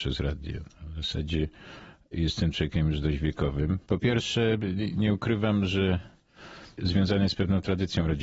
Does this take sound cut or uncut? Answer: cut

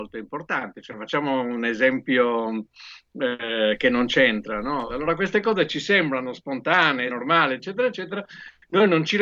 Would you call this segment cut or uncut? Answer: cut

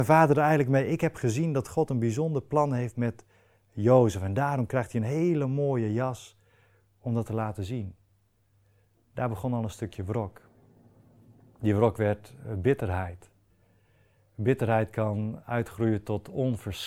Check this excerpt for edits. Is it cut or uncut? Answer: uncut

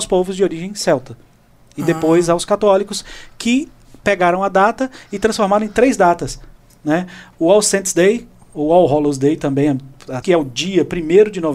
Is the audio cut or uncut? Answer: cut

